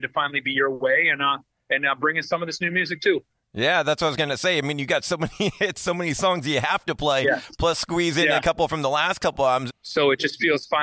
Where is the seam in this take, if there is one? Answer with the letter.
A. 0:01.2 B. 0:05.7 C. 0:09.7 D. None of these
C